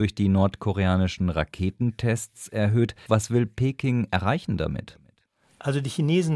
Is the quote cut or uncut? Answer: cut